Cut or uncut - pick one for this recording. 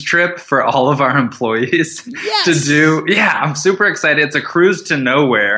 uncut